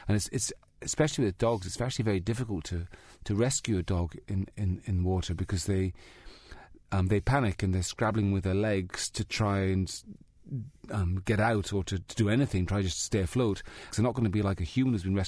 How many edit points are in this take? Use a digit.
1